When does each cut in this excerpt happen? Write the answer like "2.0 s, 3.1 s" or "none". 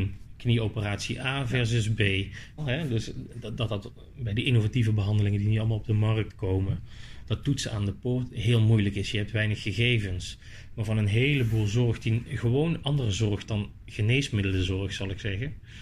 2.6 s